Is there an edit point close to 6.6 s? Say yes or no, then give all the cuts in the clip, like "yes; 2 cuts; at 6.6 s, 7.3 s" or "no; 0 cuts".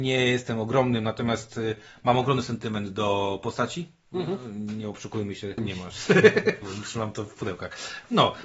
yes; 2 cuts; at 5.6 s, 6.6 s